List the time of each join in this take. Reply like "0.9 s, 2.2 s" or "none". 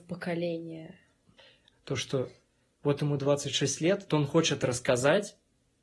1.7 s, 4.1 s